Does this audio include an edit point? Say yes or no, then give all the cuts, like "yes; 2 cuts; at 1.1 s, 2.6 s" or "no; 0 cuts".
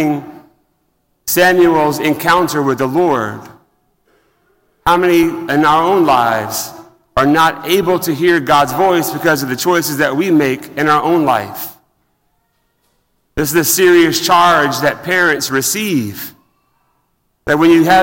no; 0 cuts